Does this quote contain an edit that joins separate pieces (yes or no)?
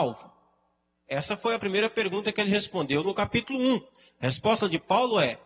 no